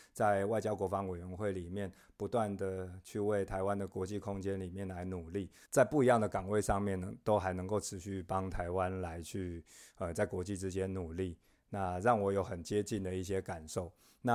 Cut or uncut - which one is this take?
cut